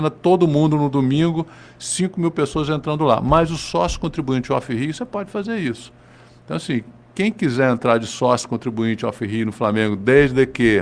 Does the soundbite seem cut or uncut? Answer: uncut